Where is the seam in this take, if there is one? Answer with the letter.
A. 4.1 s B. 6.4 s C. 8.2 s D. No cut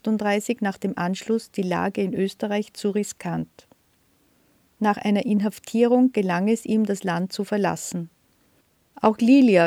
D